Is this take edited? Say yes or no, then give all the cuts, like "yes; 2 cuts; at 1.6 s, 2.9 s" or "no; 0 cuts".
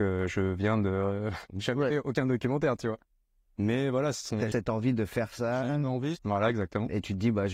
yes; 2 cuts; at 4.5 s, 6.2 s